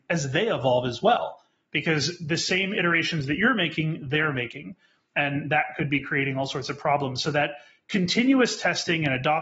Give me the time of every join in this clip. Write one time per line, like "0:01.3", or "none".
none